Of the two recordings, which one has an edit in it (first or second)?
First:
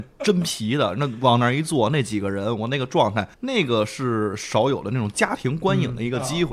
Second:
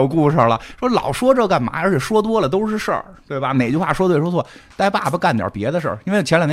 first